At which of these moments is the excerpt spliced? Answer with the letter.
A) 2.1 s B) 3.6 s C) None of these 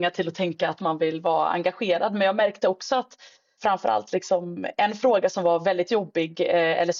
B